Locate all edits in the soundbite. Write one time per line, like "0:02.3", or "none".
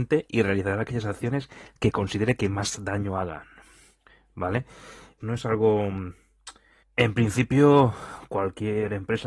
0:05.2
0:06.8